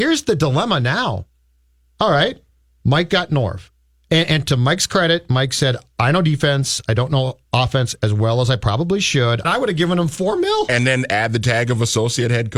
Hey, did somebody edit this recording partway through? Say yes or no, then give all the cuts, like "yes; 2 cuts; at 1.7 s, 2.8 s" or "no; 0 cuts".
yes; 1 cut; at 9.4 s